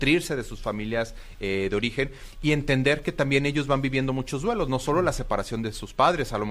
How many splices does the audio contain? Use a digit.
0